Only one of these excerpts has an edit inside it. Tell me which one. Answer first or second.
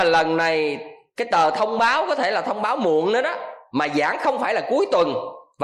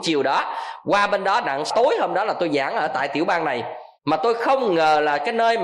second